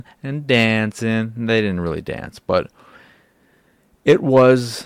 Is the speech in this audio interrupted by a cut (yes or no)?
no